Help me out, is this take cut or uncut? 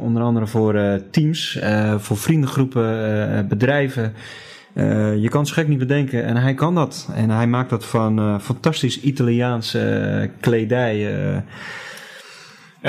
uncut